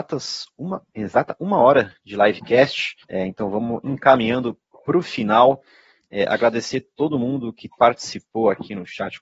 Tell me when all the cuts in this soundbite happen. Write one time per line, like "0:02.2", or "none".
0:03.0

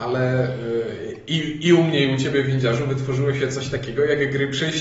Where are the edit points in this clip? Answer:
none

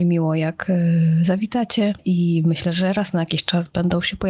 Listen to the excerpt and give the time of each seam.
0:02.0

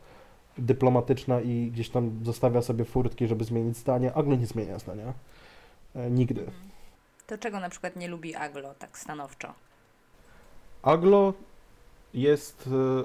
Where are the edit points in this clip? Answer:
none

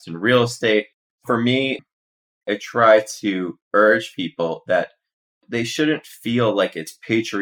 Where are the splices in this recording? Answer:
0:01.1

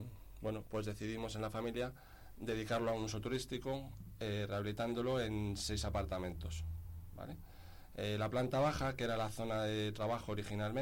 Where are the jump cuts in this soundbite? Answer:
none

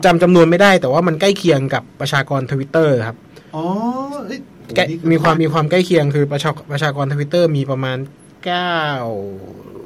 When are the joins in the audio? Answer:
0:05.3

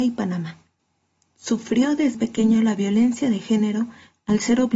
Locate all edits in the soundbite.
0:02.1

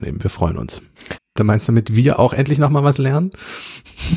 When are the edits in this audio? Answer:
0:01.2

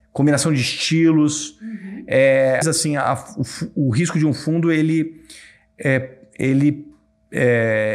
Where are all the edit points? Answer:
0:02.6

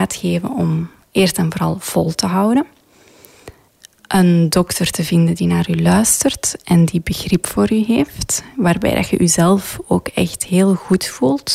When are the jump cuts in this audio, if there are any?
none

